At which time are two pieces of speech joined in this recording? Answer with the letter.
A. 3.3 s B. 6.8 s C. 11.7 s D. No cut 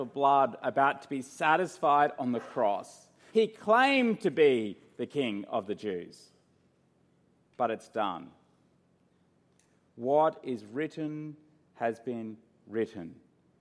A